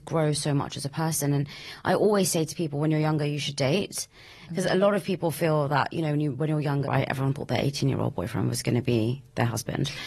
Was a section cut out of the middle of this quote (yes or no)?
yes